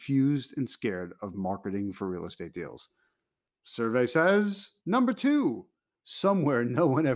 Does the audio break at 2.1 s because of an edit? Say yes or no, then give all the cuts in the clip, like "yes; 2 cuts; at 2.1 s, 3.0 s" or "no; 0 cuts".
no; 2 cuts; at 3.4 s, 4.8 s